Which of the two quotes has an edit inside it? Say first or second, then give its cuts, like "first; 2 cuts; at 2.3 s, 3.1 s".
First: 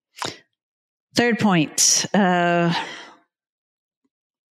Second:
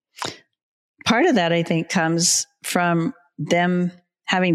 second; 1 cut; at 0.9 s